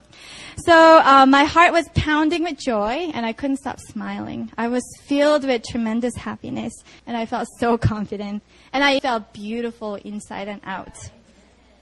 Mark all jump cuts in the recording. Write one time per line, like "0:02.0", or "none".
0:07.0
0:09.0